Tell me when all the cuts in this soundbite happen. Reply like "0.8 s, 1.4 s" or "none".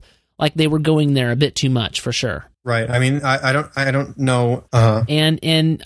2.5 s, 4.7 s